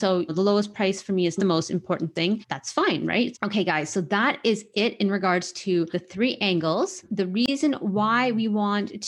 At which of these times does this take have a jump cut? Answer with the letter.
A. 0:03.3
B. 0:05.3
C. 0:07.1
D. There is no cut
A